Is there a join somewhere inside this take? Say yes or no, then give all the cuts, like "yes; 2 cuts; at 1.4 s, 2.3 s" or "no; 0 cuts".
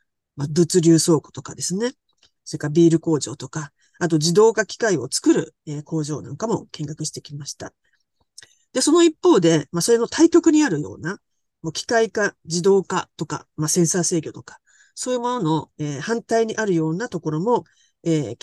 no; 0 cuts